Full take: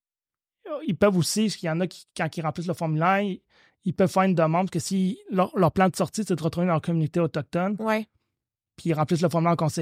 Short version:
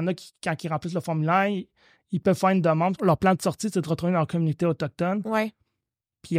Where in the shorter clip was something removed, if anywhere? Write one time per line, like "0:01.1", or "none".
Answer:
0:03.0